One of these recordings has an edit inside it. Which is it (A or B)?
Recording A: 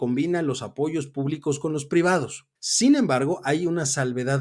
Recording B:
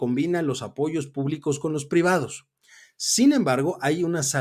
A